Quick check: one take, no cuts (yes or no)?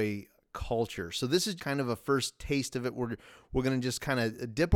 no